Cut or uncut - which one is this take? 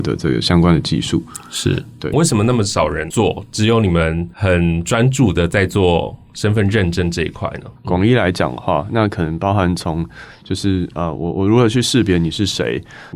cut